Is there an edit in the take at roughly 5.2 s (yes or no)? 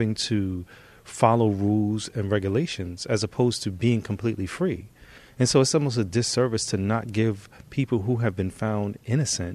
no